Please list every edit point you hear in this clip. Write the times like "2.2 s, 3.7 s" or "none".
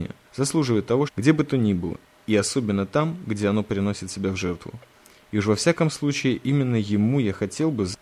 1.1 s